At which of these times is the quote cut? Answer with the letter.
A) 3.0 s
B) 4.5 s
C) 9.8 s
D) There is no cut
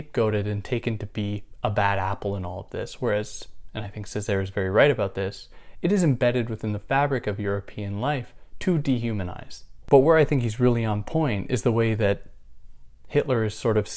C